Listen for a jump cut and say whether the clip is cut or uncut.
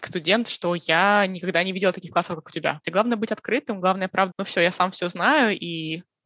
cut